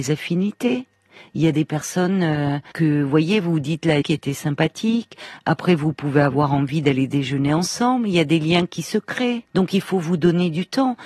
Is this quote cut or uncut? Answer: cut